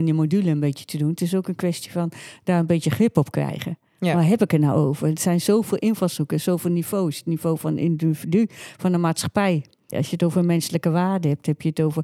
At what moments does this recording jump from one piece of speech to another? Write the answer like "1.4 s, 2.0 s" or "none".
9.9 s